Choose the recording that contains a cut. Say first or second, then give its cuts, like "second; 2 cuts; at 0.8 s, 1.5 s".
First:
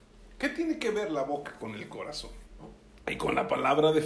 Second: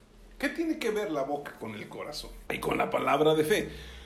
second; 1 cut; at 2.5 s